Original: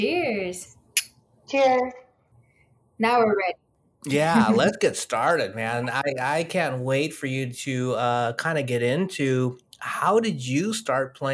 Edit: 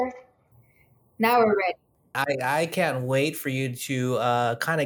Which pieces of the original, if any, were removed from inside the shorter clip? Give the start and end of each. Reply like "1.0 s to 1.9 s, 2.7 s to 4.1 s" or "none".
3.9 s to 5.9 s